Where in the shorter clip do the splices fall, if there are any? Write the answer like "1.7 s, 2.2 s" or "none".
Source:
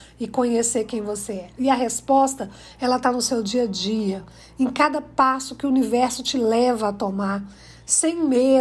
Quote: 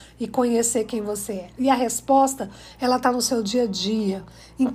none